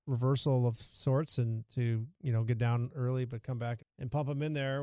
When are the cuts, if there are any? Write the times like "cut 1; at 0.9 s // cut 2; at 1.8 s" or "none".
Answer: cut 1; at 3.8 s